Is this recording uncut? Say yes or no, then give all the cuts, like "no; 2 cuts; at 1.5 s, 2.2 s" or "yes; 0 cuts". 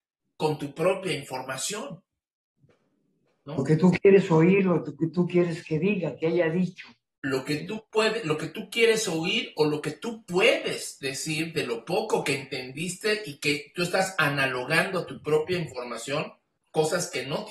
yes; 0 cuts